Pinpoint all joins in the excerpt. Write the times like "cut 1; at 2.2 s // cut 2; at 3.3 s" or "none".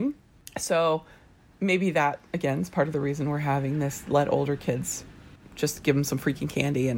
none